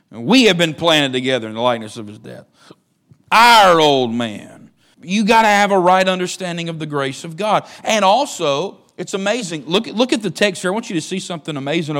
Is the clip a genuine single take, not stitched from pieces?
no; 1 cut; at 4.9 s

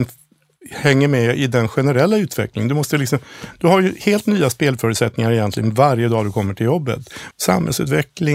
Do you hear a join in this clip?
yes; 1 cut; at 7.3 s

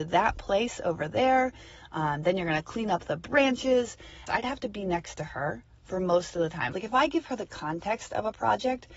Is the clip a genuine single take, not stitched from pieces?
no; 2 cuts; at 4.3 s, 6.7 s

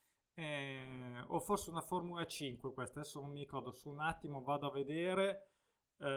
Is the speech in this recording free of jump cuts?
yes; 0 cuts

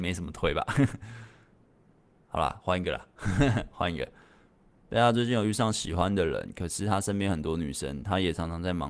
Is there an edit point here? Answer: no; 0 cuts

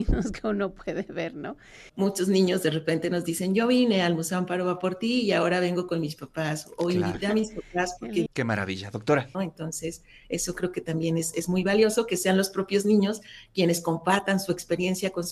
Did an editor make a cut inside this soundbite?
yes; 3 cuts; at 1.9 s, 8.3 s, 9.3 s

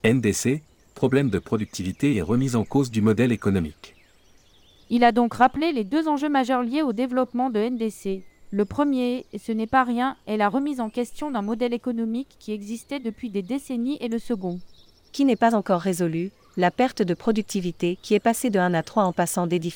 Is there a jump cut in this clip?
no; 0 cuts

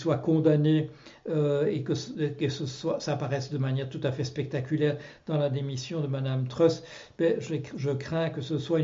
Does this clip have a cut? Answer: no; 0 cuts

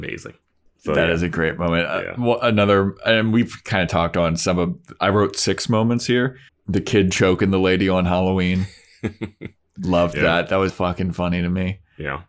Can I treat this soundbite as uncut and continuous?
no; 2 cuts; at 6.5 s, 10.7 s

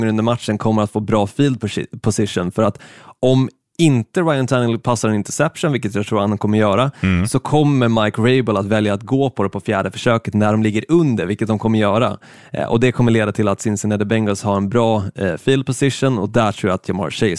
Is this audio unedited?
yes; 0 cuts

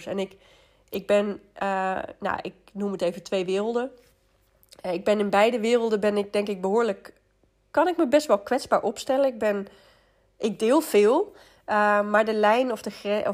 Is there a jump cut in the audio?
no; 0 cuts

